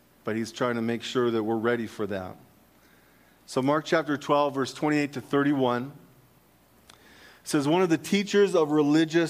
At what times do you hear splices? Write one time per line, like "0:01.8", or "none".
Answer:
none